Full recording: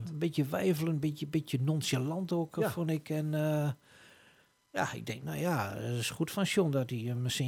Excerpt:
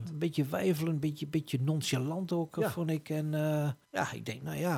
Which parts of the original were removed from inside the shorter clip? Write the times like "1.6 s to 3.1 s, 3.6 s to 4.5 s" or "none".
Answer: 3.8 s to 4.6 s